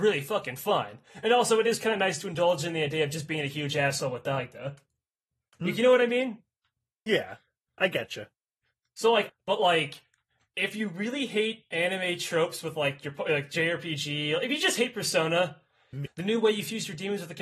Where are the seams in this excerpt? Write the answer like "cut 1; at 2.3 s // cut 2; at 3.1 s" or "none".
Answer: cut 1; at 9.3 s // cut 2; at 16.1 s